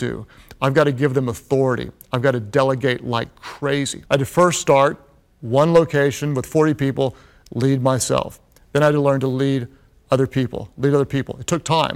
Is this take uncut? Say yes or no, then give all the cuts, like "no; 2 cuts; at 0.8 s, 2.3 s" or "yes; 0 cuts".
no; 1 cut; at 4.1 s